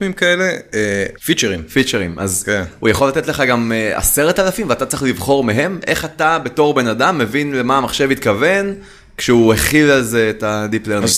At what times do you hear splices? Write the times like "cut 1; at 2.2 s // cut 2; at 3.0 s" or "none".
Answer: cut 1; at 1.2 s